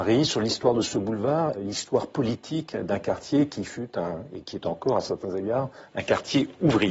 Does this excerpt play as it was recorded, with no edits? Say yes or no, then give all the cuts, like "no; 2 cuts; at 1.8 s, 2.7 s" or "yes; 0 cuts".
no; 1 cut; at 1.5 s